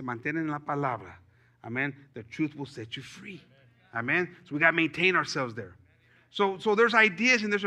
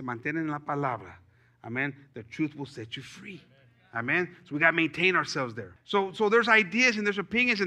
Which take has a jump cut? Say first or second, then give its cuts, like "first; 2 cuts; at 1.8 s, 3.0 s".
second; 1 cut; at 5.8 s